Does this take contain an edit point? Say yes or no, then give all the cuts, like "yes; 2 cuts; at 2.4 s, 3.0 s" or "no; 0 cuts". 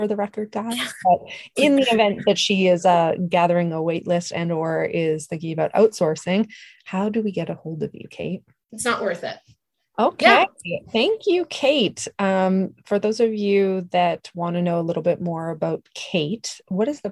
yes; 1 cut; at 8.7 s